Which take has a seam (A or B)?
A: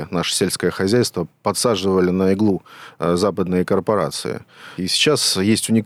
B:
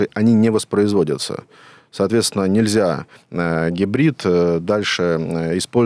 A